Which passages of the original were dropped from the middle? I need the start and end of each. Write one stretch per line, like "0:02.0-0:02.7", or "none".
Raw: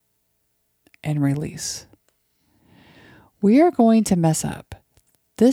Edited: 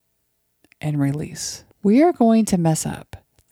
0:01.9-0:03.3

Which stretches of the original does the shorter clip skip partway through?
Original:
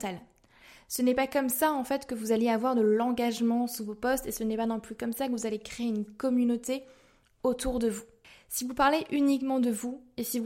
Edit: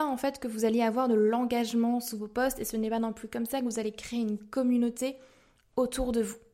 none

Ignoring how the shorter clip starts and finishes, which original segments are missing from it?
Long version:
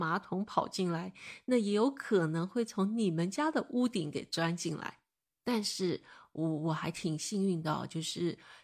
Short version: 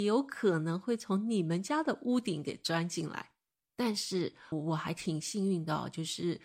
0:06.2-0:06.5

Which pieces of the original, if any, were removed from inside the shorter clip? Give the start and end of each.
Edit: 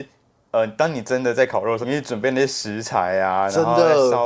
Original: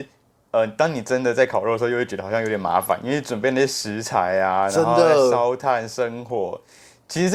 0:01.8-0:03.0

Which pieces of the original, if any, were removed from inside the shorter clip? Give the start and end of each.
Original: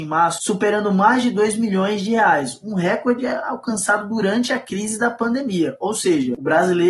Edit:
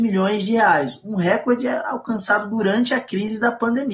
none

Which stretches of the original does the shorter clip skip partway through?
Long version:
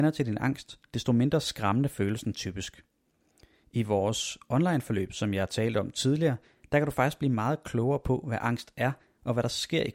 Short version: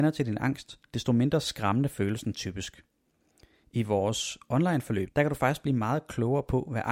0:05.1-0:06.6

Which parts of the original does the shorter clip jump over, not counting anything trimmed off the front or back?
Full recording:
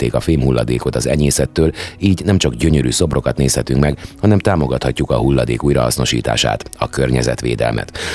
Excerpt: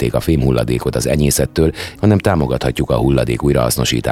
0:02.0-0:04.2

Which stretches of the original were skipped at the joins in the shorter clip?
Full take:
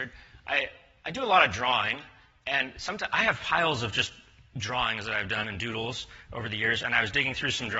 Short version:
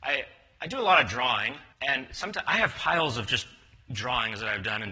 0:02.2-0:02.4

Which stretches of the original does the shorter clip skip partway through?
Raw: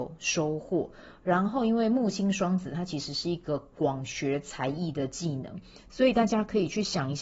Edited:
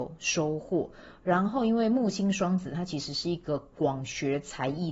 none

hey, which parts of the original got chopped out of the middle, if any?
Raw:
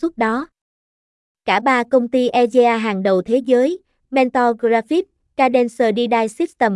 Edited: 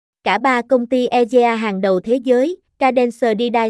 0:03.9-0:05.2

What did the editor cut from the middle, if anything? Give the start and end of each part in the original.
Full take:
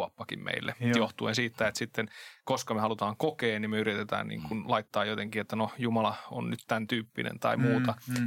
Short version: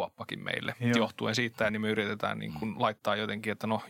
0:01.7-0:03.6

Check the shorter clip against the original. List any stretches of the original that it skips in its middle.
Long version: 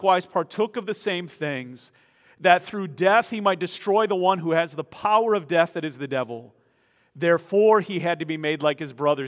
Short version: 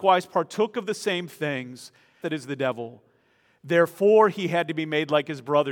0:02.2-0:05.7

